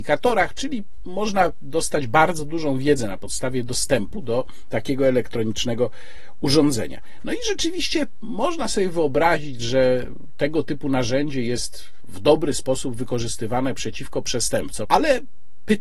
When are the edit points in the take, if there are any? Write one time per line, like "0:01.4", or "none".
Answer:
0:14.8